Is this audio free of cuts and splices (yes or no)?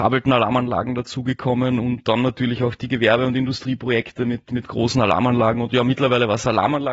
yes